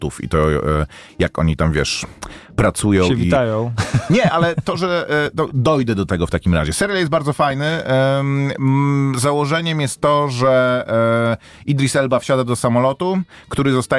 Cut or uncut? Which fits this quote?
cut